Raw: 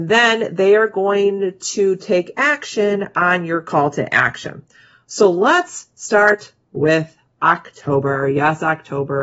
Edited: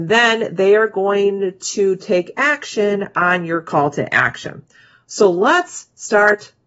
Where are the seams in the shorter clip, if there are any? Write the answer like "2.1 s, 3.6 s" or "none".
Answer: none